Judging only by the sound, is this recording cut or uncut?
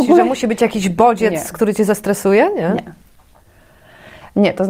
uncut